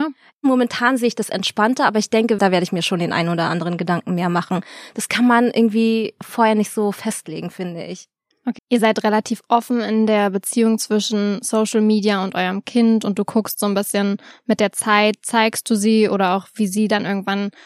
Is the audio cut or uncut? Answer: cut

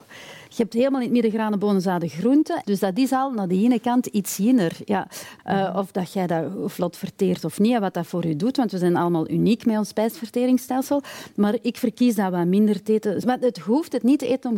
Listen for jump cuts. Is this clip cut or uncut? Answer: cut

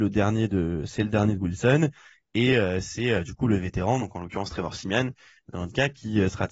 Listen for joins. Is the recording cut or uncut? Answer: uncut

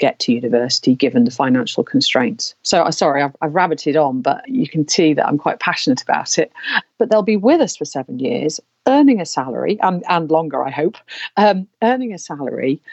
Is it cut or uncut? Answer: cut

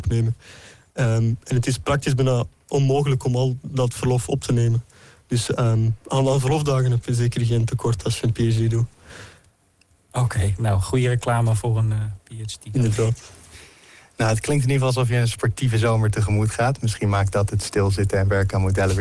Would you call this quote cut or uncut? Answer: uncut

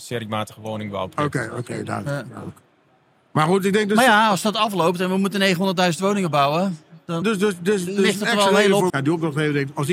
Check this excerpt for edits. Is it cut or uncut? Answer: cut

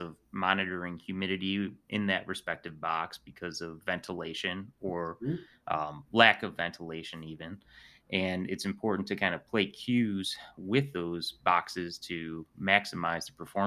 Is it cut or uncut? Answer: uncut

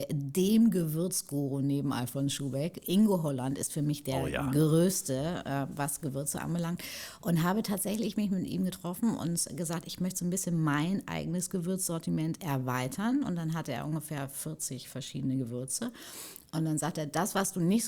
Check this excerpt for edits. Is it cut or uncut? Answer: uncut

